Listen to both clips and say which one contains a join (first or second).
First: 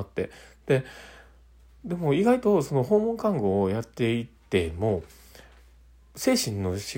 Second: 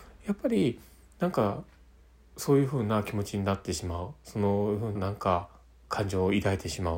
second